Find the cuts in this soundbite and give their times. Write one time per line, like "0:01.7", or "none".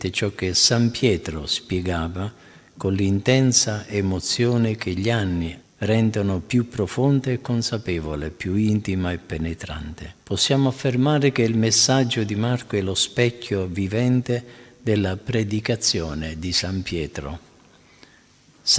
0:05.6
0:10.2